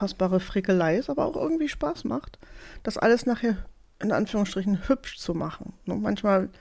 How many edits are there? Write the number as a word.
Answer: zero